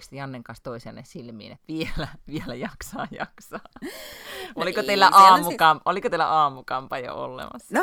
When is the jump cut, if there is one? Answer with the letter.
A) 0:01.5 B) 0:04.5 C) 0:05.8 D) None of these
A